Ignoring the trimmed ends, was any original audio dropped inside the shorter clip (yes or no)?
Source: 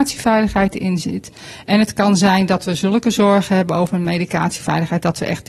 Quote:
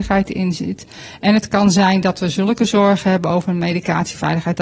no